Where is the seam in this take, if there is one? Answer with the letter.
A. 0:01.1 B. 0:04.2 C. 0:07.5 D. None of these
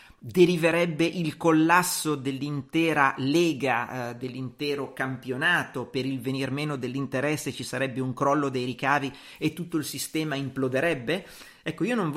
D